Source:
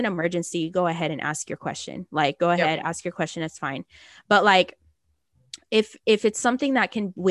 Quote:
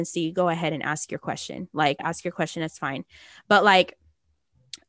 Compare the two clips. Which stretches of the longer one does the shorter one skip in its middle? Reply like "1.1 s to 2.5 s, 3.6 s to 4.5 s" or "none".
2.4 s to 2.8 s